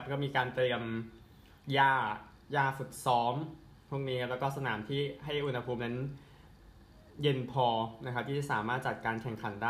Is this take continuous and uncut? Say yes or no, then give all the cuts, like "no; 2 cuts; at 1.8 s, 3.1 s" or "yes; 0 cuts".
no; 1 cut; at 2.4 s